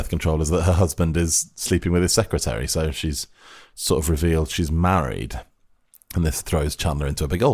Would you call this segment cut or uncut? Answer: uncut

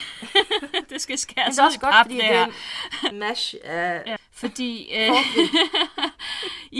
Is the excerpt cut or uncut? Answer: cut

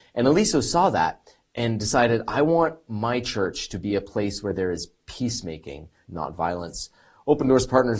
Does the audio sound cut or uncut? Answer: cut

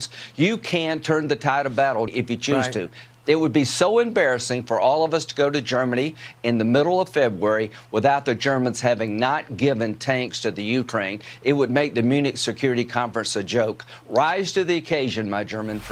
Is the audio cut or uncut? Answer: cut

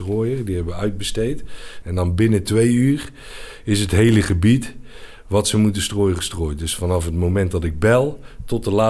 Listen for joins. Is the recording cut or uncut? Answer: cut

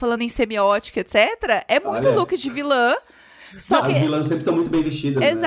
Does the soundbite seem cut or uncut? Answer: uncut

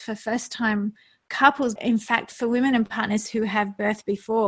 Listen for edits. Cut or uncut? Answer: cut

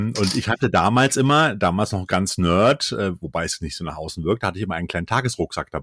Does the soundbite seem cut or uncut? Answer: uncut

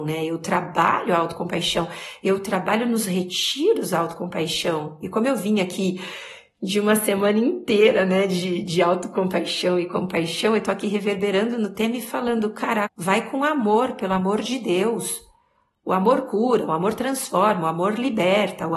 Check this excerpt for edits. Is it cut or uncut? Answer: cut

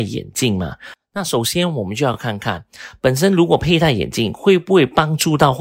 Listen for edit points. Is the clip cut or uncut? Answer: uncut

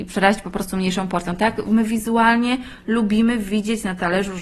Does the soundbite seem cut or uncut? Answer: uncut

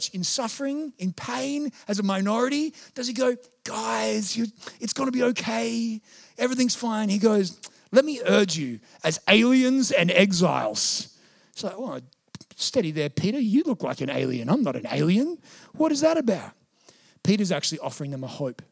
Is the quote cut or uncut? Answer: uncut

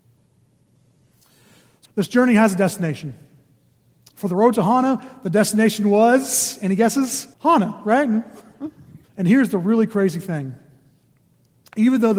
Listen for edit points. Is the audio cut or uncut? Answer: cut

